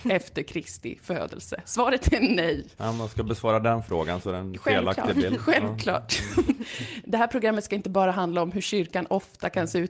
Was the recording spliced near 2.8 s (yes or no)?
yes